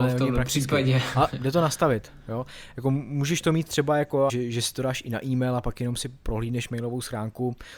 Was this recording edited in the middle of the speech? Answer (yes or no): yes